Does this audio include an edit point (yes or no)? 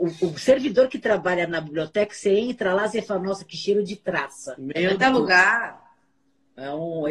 yes